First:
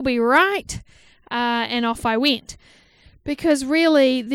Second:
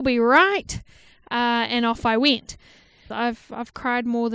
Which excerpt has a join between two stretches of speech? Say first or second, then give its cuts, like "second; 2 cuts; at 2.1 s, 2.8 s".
second; 1 cut; at 3.1 s